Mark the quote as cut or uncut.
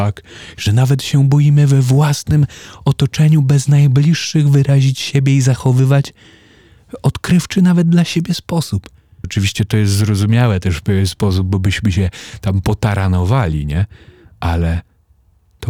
cut